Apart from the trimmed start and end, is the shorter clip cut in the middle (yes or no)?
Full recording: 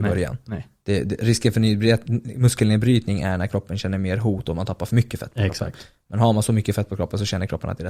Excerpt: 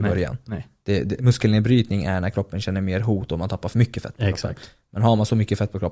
yes